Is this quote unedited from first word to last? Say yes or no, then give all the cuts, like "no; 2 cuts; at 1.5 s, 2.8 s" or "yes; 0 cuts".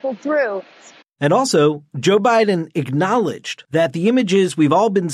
no; 1 cut; at 1.0 s